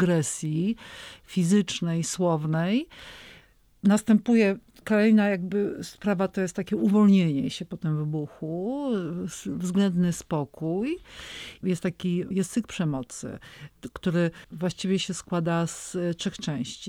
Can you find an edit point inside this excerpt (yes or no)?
yes